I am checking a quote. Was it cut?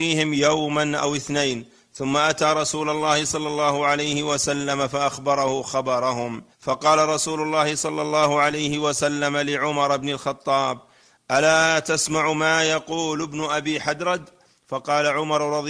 yes; 1 cut; at 6.5 s

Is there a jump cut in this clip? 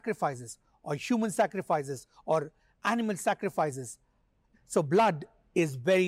yes; 1 cut; at 4.5 s

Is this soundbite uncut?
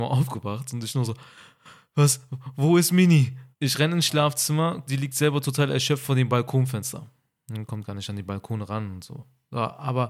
no; 2 cuts; at 3.5 s, 4.9 s

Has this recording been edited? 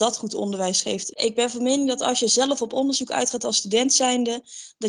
yes; 1 cut; at 1.1 s

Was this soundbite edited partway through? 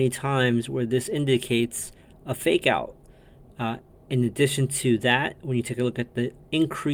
no; 0 cuts

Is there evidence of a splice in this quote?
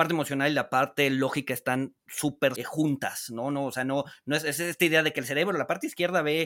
yes; 1 cut; at 2.6 s

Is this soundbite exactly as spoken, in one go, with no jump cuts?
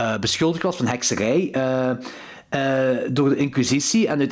yes; 0 cuts

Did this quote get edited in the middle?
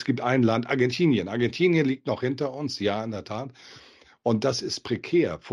no; 0 cuts

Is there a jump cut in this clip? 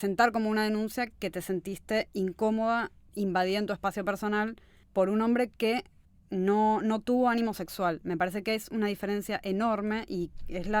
no; 0 cuts

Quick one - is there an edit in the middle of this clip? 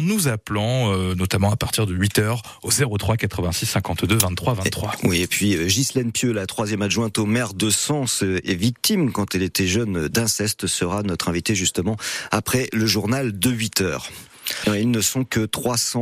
yes; 1 cut; at 14.6 s

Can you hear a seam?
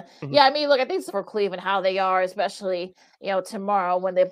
yes; 1 cut; at 1.1 s

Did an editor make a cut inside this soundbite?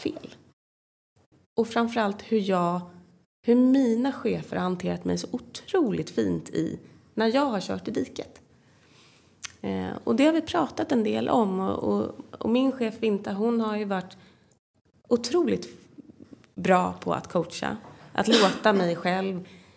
no; 0 cuts

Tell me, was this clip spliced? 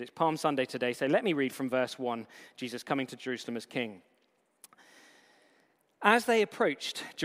no; 0 cuts

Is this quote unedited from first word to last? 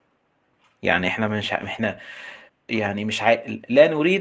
no; 1 cut; at 2.5 s

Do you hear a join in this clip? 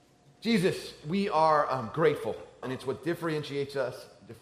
yes; 1 cut; at 2.6 s

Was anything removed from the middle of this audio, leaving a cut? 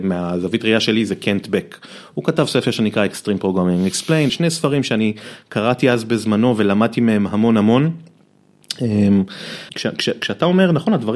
yes; 2 cuts; at 4.3 s, 9.7 s

